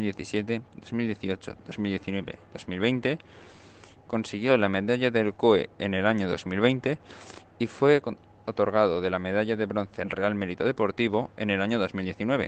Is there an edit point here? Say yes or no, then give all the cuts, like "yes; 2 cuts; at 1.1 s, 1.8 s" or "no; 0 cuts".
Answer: no; 0 cuts